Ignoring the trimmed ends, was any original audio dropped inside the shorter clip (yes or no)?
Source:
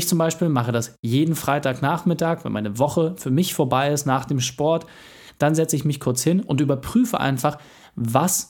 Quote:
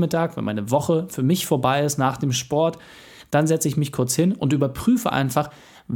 no